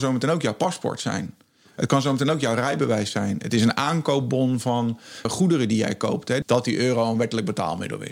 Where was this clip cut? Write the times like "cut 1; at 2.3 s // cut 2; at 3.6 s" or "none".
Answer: cut 1; at 5.2 s // cut 2; at 6.4 s